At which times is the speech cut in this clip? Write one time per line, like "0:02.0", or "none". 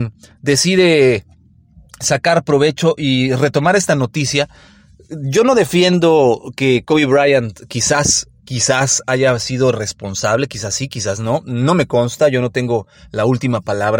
none